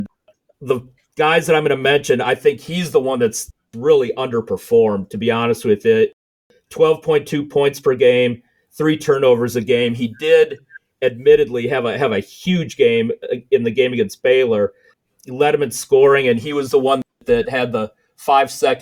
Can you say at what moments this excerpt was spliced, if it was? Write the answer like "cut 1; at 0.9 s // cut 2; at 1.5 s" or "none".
none